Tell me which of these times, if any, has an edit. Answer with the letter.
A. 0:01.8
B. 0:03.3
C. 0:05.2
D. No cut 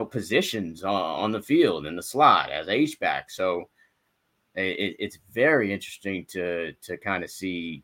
D